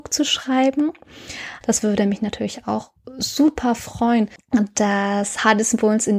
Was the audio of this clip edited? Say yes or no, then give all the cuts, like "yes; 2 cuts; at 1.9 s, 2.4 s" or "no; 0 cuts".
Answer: yes; 2 cuts; at 1.6 s, 4.4 s